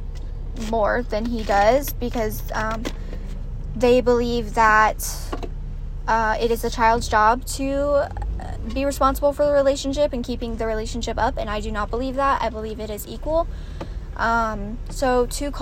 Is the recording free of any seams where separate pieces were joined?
yes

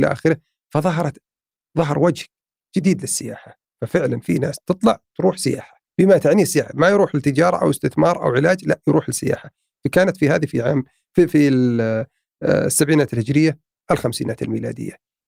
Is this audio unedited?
no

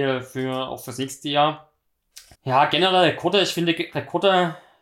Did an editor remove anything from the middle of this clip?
yes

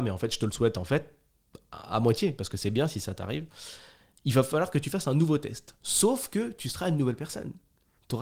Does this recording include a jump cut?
no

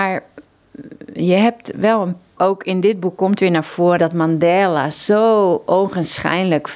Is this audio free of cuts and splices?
no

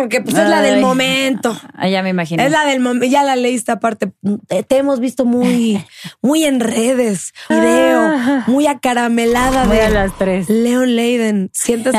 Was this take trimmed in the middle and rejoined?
yes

